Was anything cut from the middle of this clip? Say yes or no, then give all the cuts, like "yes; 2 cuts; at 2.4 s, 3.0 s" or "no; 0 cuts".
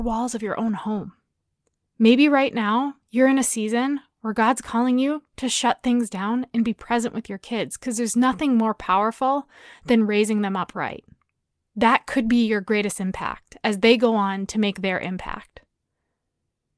no; 0 cuts